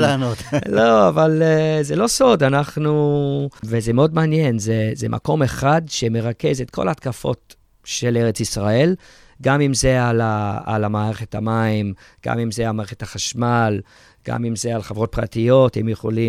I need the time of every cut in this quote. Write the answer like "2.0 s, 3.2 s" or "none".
3.6 s